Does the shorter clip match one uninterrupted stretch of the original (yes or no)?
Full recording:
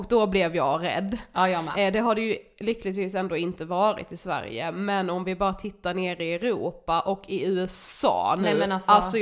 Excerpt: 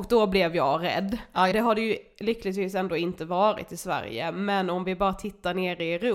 no